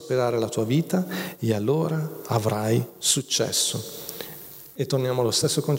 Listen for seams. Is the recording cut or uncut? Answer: cut